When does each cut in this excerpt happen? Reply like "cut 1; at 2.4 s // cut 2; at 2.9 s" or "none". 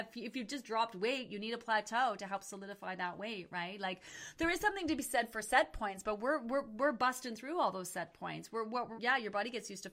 cut 1; at 8.9 s